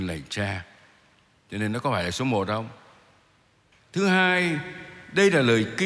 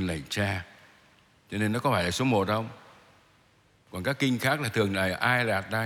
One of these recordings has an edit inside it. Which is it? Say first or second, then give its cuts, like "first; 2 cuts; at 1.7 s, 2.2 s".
first; 1 cut; at 3.7 s